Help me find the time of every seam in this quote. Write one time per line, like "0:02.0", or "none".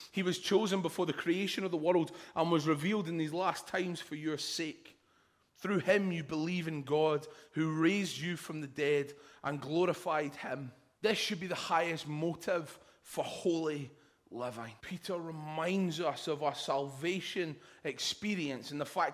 0:11.0
0:14.8